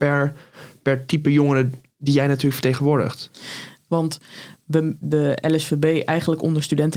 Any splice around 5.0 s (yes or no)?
yes